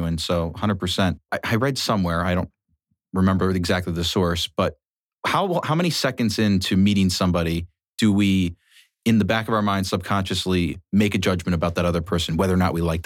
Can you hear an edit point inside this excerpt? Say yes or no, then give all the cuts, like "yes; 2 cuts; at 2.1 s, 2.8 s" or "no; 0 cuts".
yes; 1 cut; at 1.3 s